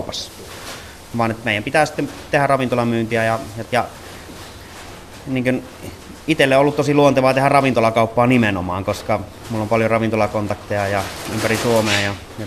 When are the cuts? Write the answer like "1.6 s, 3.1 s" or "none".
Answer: 3.7 s

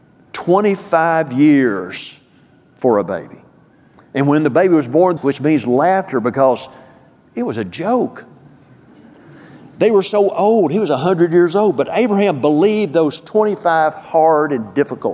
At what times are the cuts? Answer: 5.2 s

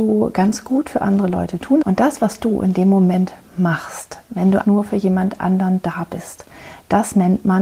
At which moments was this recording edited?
1.8 s, 4.6 s

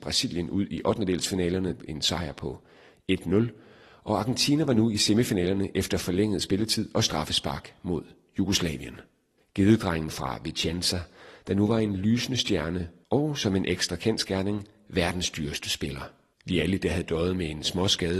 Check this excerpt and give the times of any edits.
9.4 s, 16.3 s

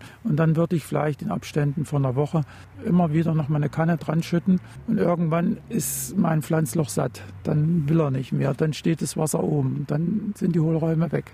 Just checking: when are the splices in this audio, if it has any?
none

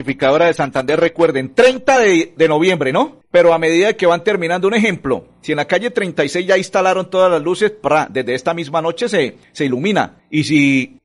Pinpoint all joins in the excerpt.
none

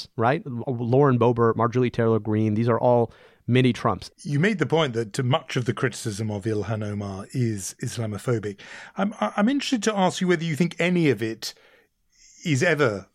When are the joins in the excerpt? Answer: 4.1 s

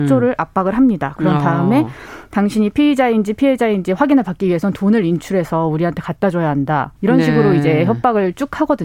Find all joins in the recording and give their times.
7.0 s

